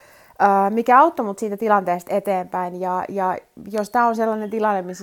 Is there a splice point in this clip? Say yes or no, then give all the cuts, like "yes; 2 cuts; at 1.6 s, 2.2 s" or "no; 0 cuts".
no; 0 cuts